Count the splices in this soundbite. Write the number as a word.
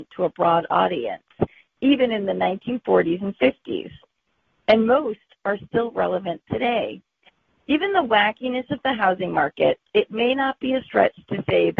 zero